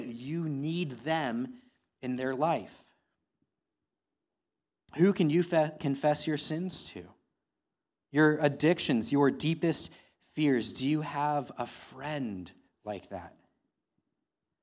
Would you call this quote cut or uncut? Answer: uncut